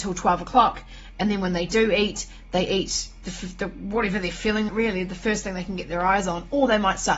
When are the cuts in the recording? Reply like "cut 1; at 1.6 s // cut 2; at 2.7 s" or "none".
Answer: cut 1; at 4.7 s